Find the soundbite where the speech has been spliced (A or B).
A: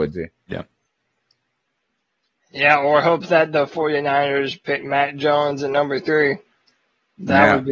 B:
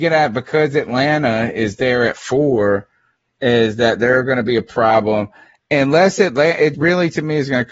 B